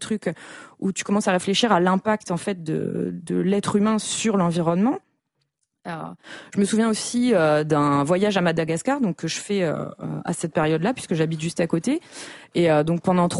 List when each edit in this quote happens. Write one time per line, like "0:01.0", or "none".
none